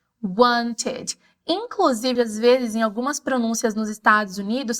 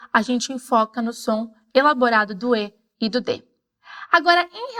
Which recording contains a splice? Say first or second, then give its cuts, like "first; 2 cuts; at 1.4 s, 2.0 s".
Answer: first; 1 cut; at 2.2 s